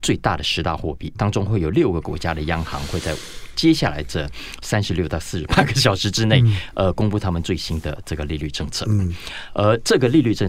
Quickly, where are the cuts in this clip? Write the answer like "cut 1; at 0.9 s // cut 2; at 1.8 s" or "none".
cut 1; at 1.1 s